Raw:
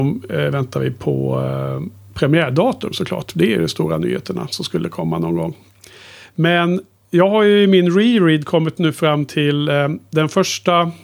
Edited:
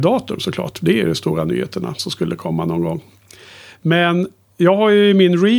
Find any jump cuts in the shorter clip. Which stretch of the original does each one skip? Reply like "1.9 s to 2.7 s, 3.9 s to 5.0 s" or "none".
none